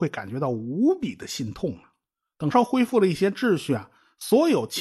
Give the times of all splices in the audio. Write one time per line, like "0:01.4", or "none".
0:02.5